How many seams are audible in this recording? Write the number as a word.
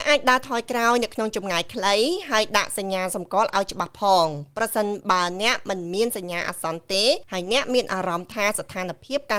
one